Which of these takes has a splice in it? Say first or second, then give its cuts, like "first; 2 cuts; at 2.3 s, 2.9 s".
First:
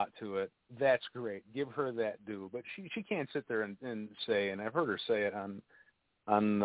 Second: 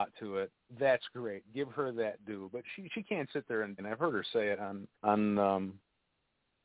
second; 2 cuts; at 3.8 s, 4.9 s